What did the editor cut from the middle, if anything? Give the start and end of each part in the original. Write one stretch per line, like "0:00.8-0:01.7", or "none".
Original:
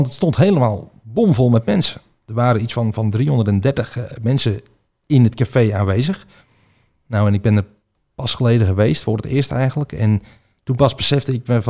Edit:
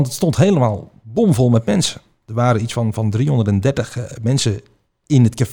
none